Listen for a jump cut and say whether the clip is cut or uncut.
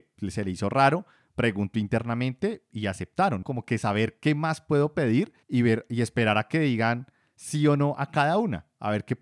cut